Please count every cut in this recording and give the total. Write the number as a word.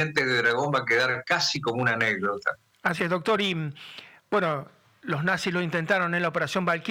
zero